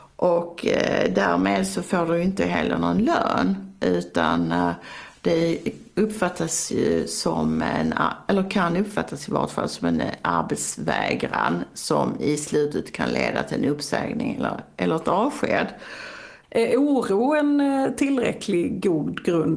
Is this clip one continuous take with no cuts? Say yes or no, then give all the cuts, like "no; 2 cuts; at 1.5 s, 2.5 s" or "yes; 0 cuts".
no; 1 cut; at 16.4 s